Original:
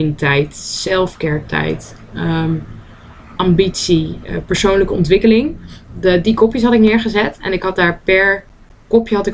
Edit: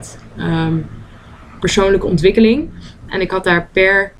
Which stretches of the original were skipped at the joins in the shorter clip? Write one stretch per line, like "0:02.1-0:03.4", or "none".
0:03.4-0:04.5
0:05.9-0:07.4

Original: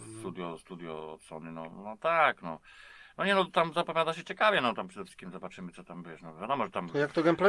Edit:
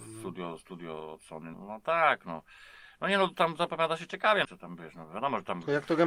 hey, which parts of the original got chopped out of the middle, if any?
0:01.5-0:01.7
0:04.6-0:05.7

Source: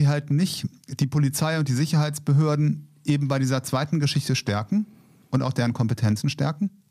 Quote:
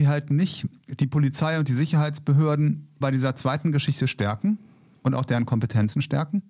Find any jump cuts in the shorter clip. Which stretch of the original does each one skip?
0:03.0-0:03.3

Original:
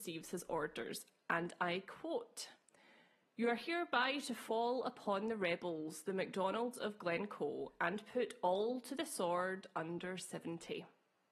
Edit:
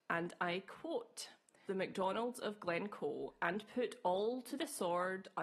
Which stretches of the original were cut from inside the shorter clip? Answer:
0:02.9-0:06.0

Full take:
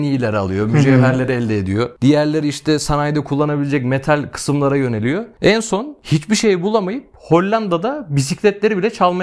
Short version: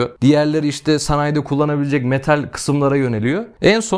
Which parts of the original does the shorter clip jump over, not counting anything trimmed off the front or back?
none

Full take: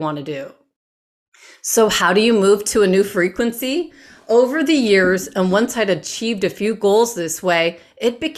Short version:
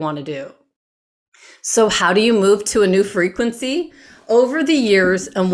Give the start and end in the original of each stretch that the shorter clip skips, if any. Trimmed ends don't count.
none

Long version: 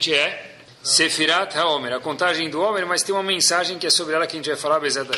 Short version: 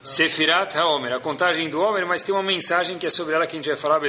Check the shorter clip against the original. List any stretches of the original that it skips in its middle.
none

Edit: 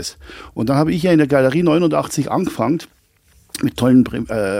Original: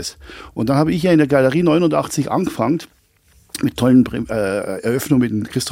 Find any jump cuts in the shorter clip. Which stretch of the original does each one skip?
none

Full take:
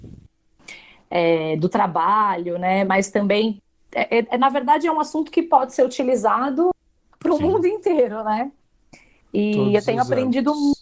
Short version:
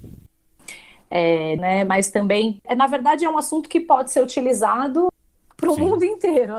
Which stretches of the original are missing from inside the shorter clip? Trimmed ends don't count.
0:01.6-0:02.6
0:03.6-0:04.3

